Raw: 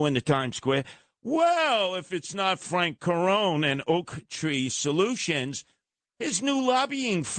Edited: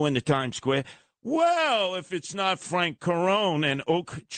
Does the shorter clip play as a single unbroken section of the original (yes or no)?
yes